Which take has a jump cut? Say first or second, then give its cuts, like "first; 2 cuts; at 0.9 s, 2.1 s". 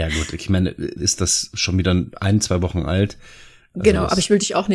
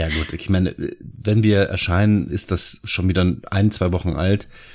first; 1 cut; at 1.0 s